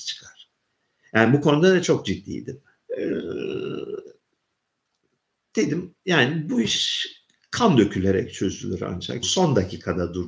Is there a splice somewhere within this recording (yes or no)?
yes